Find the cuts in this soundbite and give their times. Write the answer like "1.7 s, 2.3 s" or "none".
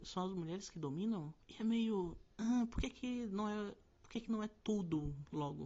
1.4 s

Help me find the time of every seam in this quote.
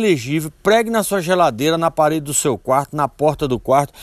none

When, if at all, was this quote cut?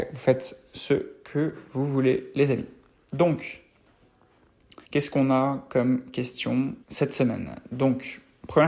4.8 s, 6.8 s

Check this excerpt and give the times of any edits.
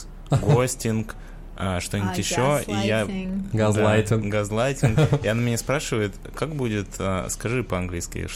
none

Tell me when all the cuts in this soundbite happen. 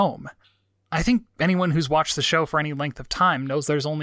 none

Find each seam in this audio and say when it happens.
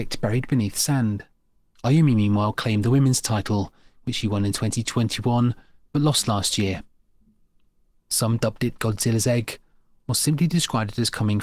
1.7 s, 8.0 s

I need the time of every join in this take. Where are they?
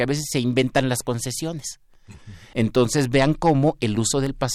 2.5 s

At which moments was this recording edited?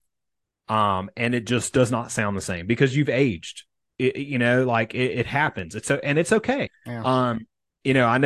6.7 s

